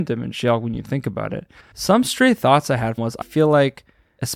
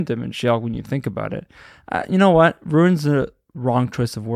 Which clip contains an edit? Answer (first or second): first